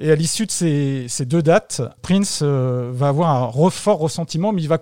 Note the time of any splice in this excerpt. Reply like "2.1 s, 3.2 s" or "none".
2.0 s